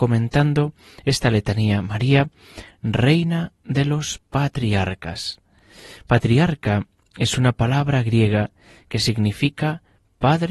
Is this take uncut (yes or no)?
yes